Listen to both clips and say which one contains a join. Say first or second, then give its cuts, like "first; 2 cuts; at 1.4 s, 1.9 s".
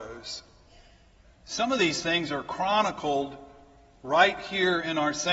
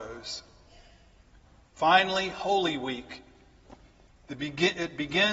first; 1 cut; at 1.2 s